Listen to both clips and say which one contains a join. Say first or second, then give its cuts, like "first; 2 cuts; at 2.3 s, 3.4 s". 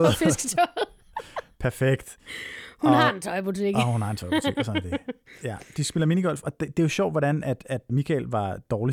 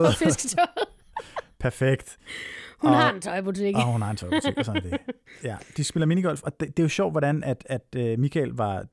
first; 1 cut; at 7.9 s